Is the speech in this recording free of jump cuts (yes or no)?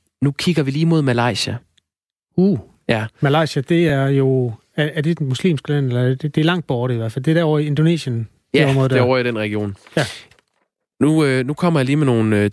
yes